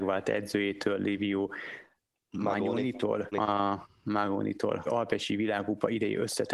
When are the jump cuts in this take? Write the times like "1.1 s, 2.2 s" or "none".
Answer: 3.3 s, 4.9 s